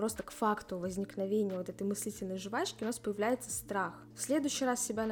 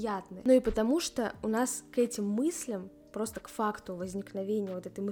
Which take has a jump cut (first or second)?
first